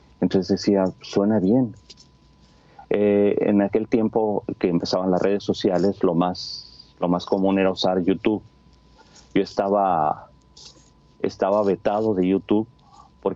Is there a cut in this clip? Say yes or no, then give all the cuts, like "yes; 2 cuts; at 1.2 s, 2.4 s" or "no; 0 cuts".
no; 0 cuts